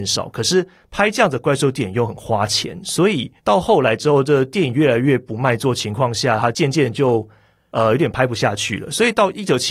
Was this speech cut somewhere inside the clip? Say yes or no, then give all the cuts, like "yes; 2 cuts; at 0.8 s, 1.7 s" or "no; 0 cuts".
yes; 1 cut; at 3.4 s